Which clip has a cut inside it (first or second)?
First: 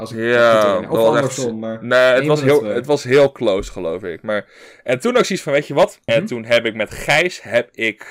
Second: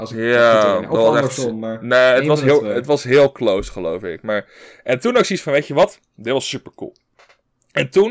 first